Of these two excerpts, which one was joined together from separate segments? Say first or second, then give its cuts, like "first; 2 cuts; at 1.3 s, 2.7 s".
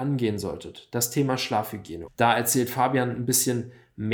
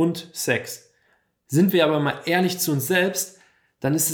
first; 1 cut; at 2.1 s